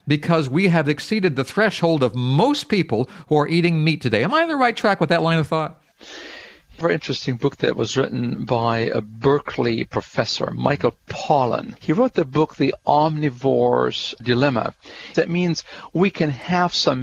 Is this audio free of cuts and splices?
no; 3 cuts; at 6.8 s, 11.8 s, 15.1 s

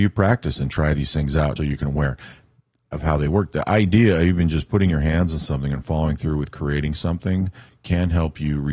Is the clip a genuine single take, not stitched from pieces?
no; 1 cut; at 1.6 s

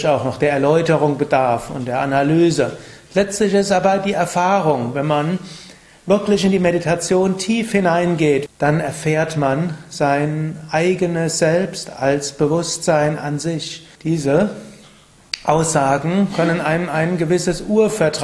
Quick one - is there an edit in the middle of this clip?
yes; 2 cuts; at 8.5 s, 14.0 s

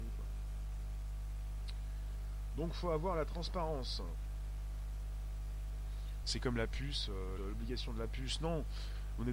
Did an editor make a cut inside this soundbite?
yes; 2 cuts; at 6.2 s, 7.4 s

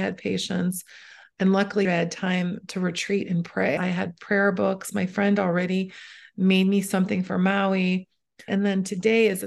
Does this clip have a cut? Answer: yes; 3 cuts; at 1.8 s, 3.8 s, 8.5 s

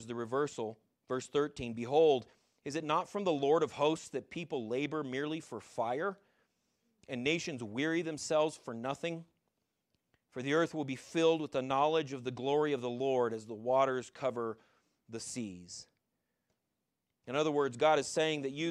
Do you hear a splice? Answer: no; 0 cuts

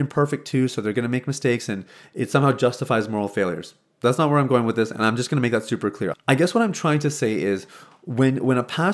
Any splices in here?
yes; 1 cut; at 6.1 s

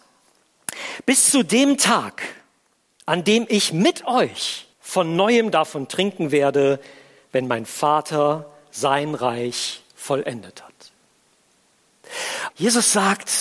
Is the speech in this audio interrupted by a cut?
yes; 2 cuts; at 4.7 s, 12.5 s

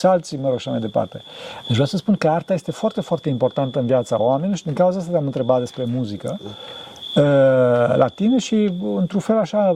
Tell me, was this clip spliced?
yes; 1 cut; at 1.6 s

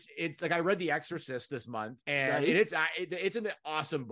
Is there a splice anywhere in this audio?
yes; 1 cut; at 2.0 s

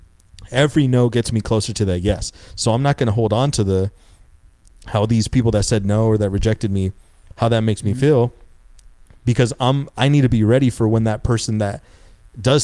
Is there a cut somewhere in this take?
no; 0 cuts

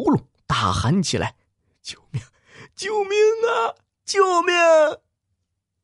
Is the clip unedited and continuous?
yes; 0 cuts

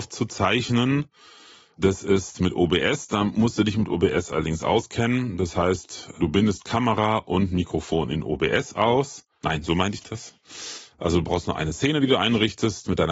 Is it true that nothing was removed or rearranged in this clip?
no; 1 cut; at 9.6 s

